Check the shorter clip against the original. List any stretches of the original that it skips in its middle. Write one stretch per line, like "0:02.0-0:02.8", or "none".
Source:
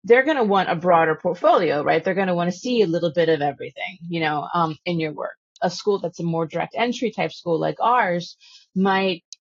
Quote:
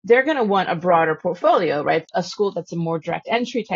0:02.0-0:05.5

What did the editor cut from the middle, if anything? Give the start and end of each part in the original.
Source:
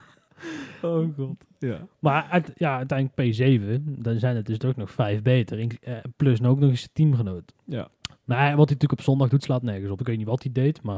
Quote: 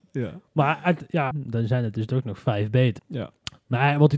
0:02.8-0:03.8
0:05.5-0:07.6

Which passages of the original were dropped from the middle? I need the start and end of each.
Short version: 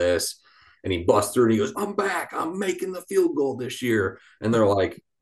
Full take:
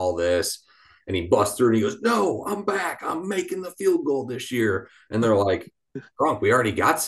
0:02.0-0:02.4

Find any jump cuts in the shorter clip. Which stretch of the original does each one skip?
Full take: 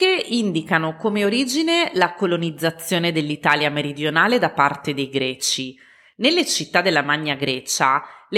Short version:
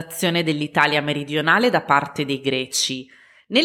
none

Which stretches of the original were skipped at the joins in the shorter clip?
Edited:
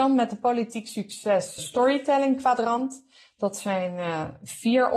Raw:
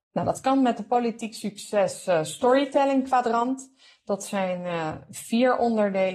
0:02.1-0:02.3

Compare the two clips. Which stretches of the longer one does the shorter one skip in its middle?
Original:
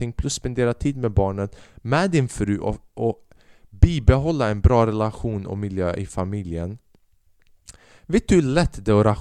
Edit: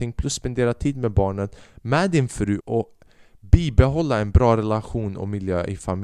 0:02.6-0:02.9

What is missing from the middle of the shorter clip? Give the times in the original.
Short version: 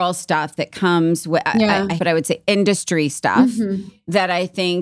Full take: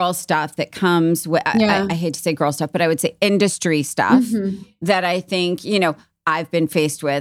0:02.0-0:02.7

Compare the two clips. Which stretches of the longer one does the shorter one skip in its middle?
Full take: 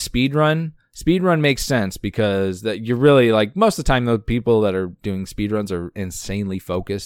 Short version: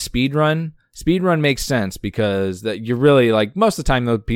none

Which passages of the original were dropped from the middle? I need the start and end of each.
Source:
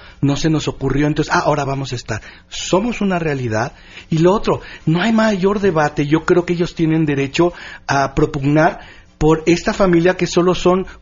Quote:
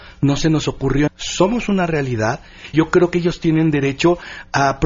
0:01.1-0:02.4
0:04.1-0:06.1

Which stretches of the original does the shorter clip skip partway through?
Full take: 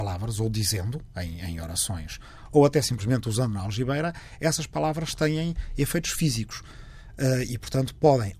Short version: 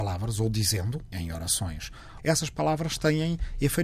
0:01.1-0:01.4
0:02.5-0:04.4

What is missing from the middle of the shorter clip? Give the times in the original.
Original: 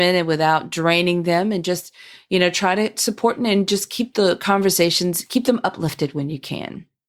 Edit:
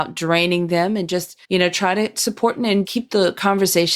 0:02.0-0:02.2
0:03.7-0:03.9

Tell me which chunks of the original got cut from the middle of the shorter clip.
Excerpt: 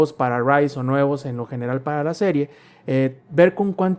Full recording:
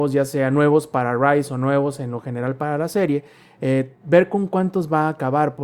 none

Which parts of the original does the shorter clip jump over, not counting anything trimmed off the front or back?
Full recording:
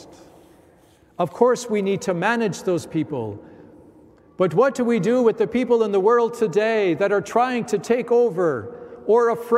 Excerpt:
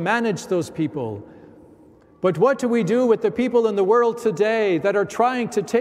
none

